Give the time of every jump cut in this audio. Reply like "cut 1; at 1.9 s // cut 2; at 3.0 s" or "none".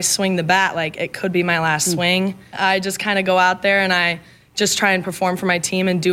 cut 1; at 2.5 s